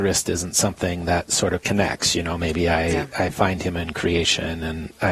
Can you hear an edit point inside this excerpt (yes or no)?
no